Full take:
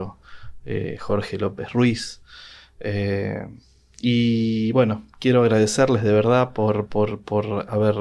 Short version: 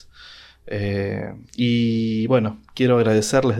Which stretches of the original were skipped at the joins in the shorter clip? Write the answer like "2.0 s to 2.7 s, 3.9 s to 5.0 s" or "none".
3.6 s to 3.9 s